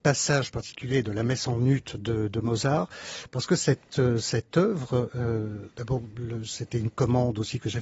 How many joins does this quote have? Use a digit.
0